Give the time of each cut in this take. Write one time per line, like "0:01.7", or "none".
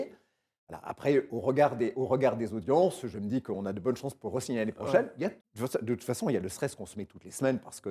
0:05.4